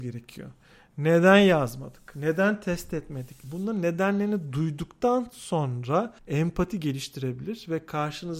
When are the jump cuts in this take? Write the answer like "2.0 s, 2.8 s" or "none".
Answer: 3.4 s, 6.2 s